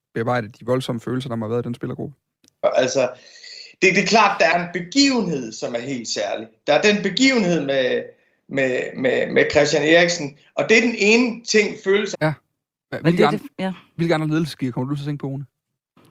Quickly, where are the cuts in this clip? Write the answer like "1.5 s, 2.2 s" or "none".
2.6 s, 12.1 s